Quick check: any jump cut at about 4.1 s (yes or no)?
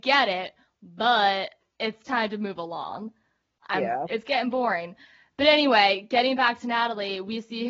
yes